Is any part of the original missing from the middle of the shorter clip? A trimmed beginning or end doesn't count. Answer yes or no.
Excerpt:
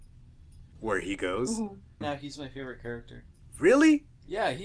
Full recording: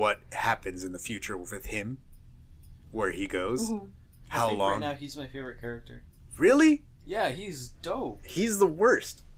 yes